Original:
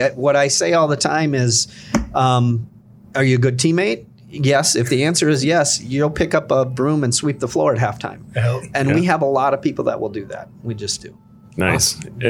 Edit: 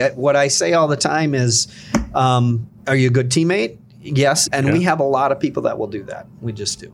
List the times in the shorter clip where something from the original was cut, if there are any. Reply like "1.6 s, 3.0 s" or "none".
2.8 s, 4.5 s

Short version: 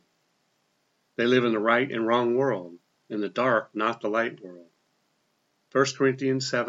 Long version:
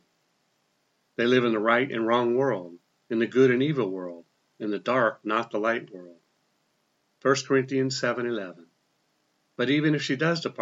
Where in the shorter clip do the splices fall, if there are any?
2.9 s

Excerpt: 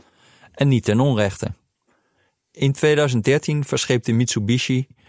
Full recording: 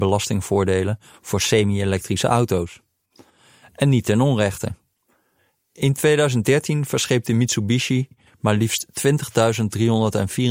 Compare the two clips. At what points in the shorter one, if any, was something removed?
none

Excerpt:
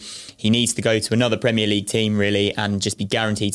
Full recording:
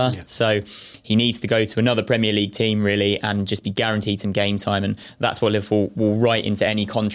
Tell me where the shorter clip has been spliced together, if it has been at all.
none

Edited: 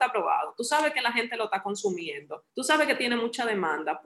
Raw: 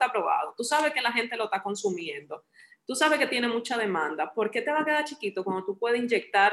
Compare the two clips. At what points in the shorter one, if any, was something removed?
2.5 s

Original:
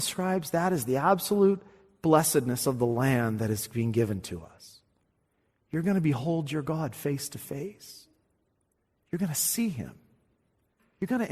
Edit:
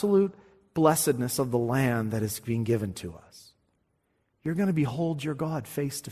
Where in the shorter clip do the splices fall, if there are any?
none

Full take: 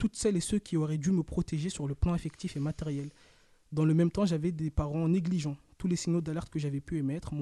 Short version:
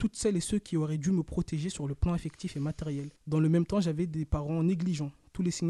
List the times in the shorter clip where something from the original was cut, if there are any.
3.2 s

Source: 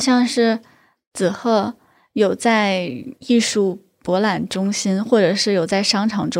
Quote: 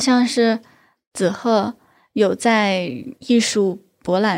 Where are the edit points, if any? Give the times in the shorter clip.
none

